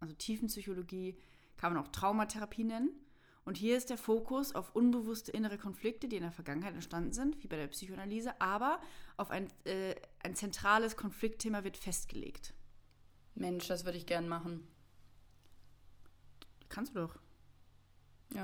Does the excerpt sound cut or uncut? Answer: uncut